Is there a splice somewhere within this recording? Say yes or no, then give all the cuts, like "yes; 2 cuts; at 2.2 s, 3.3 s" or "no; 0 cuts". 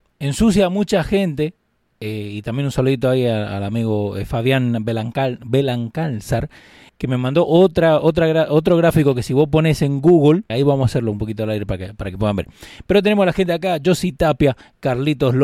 yes; 2 cuts; at 6.9 s, 10.5 s